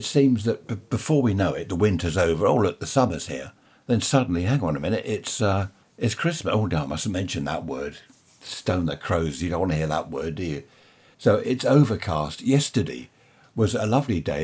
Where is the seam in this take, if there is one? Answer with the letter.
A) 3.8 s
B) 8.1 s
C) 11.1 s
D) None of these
C